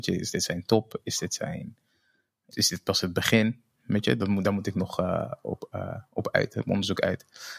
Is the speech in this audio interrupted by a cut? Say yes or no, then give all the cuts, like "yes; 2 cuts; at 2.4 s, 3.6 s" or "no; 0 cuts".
yes; 1 cut; at 2.5 s